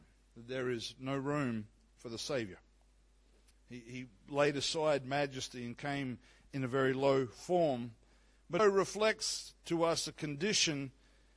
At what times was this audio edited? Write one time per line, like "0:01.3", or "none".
0:03.5
0:08.6